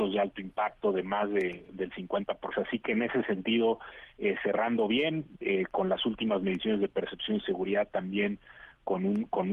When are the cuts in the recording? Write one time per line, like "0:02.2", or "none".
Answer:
0:02.5